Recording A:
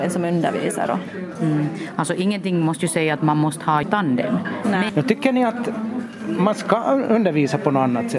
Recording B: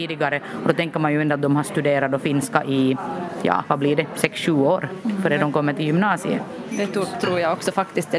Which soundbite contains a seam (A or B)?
A